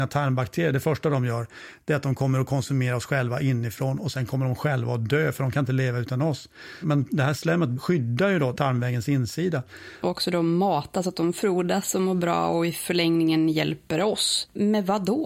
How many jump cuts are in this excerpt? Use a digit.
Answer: 2